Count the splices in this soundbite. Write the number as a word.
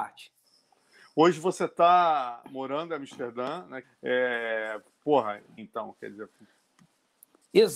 two